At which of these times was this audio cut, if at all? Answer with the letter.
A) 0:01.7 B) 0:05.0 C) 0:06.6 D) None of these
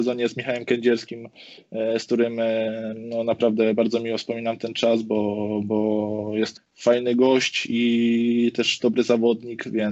C